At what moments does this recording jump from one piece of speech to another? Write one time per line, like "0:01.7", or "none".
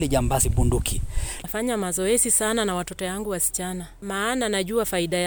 0:01.4